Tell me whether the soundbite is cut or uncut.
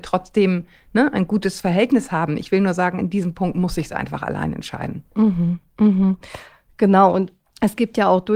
uncut